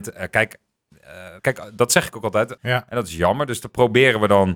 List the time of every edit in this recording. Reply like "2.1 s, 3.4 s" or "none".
1.4 s, 2.6 s

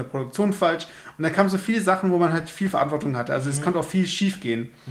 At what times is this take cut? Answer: none

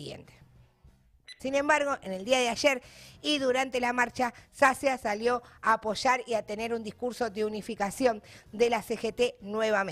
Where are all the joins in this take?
1.4 s

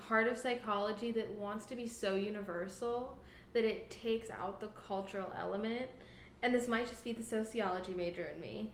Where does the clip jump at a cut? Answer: none

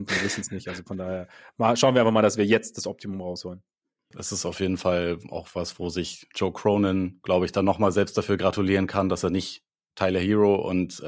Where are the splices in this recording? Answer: 4.1 s

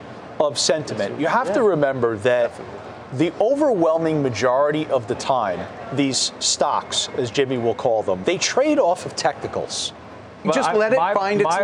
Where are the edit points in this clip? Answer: 8.2 s, 10.4 s

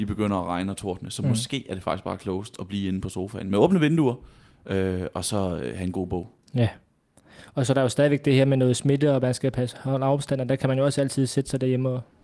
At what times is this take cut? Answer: none

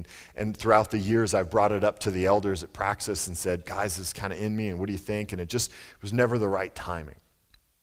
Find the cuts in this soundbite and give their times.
none

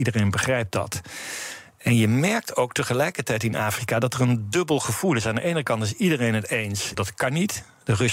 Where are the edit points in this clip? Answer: 6.9 s

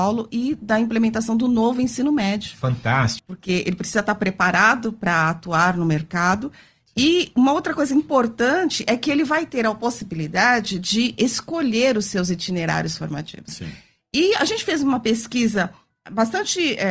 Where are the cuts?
3.2 s, 13.5 s

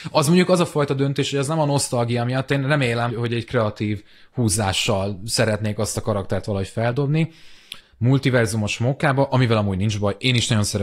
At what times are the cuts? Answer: 3.1 s, 7.8 s

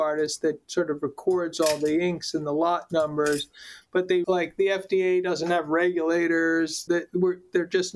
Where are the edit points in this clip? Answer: 4.2 s, 6.9 s

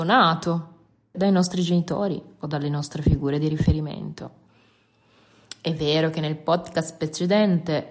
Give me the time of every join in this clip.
1.1 s

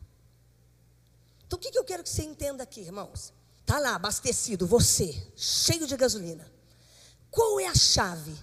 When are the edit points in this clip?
3.6 s

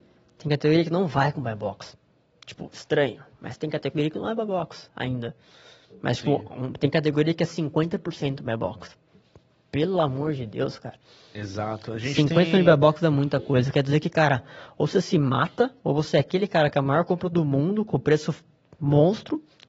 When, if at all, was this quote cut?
none

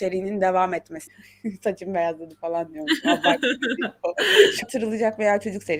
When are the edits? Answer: 1.1 s, 4.6 s

